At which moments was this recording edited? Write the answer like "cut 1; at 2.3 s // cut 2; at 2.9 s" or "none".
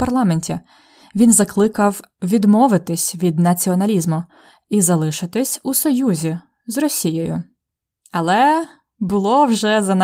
none